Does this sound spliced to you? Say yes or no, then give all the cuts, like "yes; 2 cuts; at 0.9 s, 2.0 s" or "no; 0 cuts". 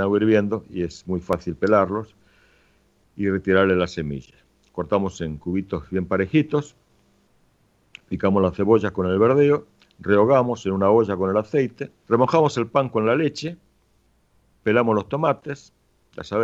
yes; 1 cut; at 12.0 s